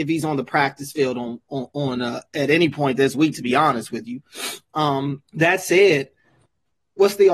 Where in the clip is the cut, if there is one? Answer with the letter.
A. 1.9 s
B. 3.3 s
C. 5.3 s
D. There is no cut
C